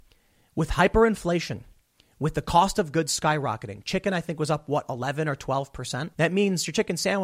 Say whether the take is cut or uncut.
cut